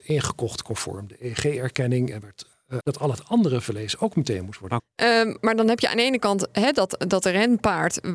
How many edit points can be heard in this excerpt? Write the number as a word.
two